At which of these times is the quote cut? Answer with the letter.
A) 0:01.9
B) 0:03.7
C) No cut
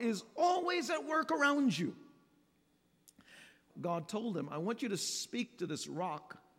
B